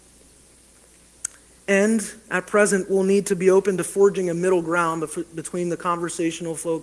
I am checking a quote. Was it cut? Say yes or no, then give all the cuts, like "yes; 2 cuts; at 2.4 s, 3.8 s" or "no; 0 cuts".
no; 0 cuts